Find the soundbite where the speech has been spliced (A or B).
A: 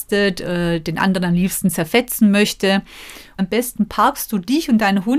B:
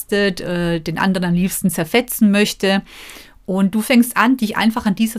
A